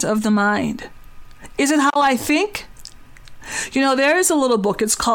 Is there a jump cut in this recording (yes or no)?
yes